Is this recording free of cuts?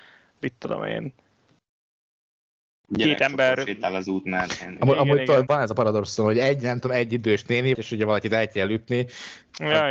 no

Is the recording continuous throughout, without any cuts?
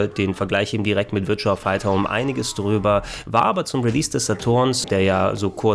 no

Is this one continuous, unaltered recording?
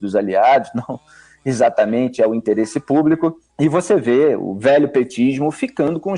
no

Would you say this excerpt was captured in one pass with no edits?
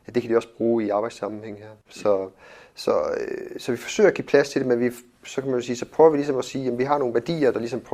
no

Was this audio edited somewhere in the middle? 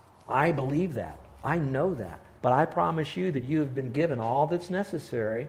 yes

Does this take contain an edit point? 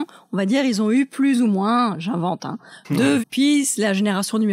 yes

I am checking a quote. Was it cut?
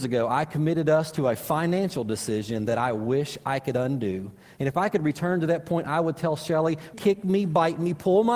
yes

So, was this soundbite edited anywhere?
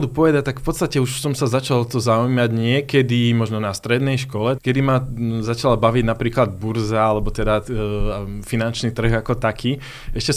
yes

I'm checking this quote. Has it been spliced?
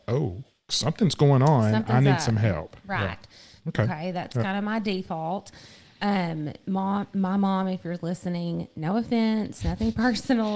yes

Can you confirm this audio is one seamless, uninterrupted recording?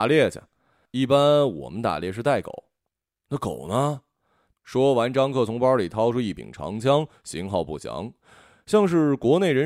no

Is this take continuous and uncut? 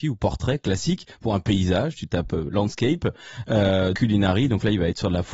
no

